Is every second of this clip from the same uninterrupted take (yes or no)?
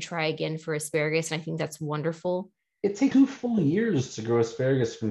no